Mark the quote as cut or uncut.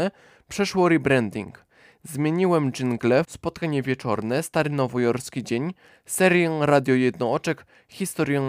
cut